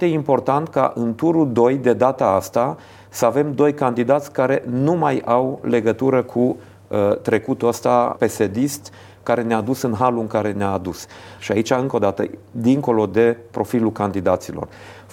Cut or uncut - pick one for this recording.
cut